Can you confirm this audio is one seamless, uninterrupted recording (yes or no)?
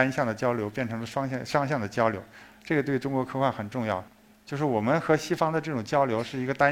no